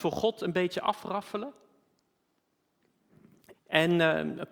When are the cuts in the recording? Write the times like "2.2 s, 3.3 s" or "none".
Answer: 3.5 s

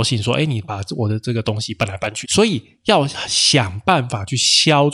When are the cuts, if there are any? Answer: 2.2 s

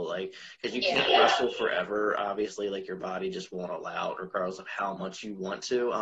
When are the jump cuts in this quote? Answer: none

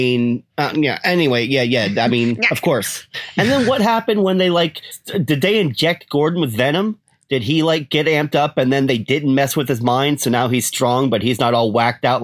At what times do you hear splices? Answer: none

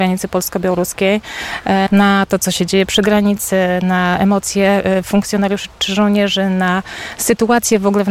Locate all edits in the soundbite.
1.9 s

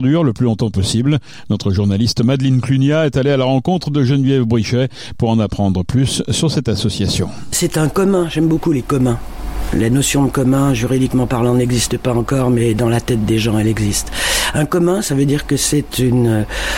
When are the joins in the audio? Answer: none

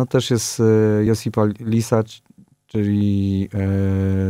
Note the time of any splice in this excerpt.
none

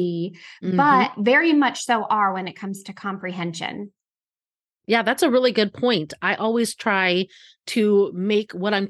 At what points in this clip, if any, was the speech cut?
none

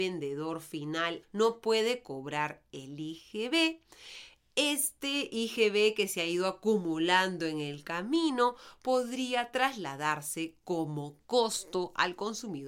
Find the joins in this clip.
1.2 s

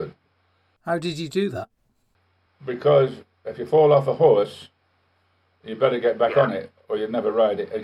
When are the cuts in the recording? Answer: none

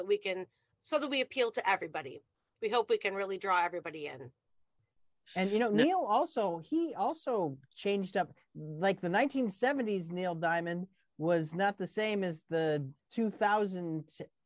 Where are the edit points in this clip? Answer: none

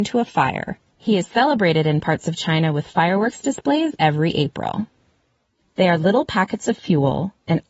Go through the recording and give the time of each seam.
0.9 s, 5.6 s

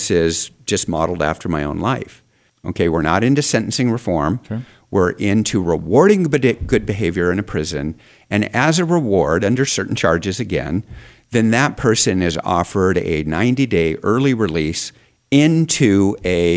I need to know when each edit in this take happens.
2.5 s

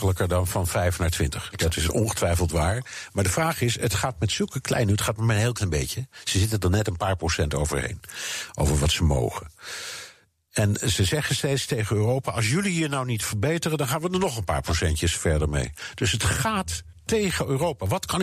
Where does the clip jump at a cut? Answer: none

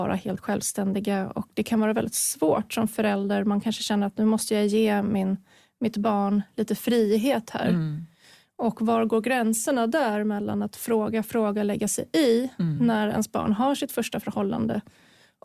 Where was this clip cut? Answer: none

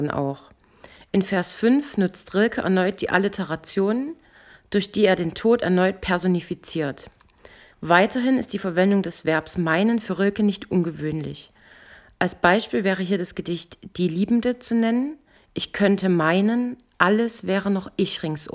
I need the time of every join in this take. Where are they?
7.7 s, 15.4 s

